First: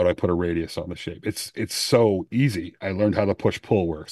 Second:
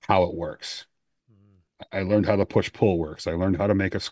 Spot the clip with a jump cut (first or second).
first